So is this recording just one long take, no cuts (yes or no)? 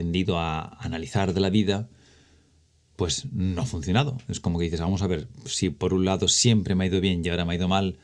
yes